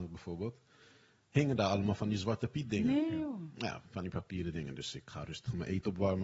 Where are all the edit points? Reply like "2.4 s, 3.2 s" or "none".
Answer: none